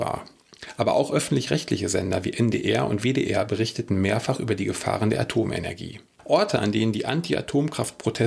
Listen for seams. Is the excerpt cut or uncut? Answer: uncut